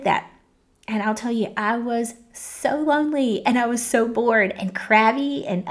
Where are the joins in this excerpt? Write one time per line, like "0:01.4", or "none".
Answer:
none